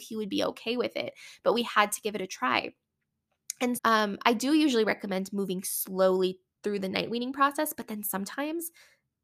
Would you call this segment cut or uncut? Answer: cut